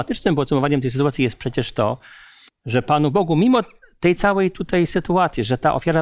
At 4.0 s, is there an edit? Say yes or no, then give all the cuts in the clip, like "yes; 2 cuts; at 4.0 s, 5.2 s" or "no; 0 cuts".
no; 1 cut; at 2.5 s